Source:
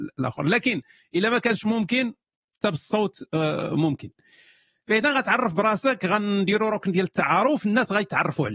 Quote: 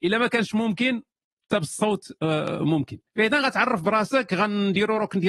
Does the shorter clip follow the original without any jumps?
no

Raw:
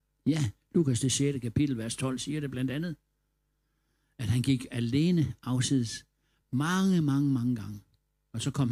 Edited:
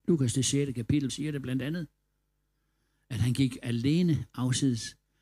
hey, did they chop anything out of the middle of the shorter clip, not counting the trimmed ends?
yes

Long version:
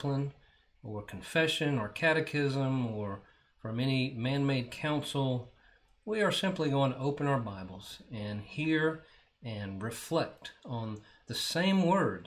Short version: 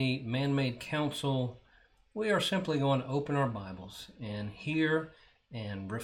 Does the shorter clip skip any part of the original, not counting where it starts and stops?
no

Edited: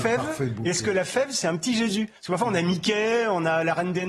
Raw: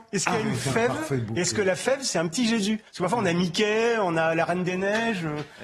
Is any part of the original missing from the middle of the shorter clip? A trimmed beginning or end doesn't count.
no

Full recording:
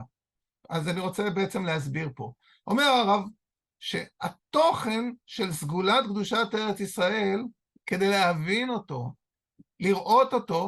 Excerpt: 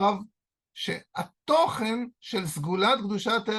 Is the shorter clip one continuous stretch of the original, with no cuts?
yes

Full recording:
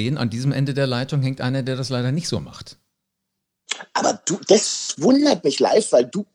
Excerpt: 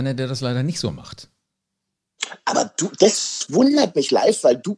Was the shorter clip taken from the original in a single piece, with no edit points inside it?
yes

